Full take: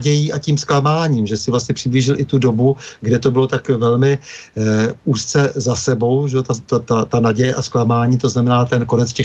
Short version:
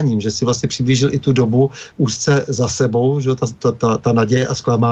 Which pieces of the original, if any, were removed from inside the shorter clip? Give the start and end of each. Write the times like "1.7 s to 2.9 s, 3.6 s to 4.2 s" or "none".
3.0 s to 5.0 s